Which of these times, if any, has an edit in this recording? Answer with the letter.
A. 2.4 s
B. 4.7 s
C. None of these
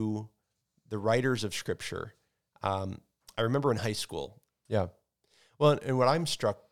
B